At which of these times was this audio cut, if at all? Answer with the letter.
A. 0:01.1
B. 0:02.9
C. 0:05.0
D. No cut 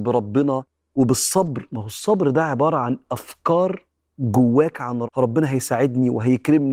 C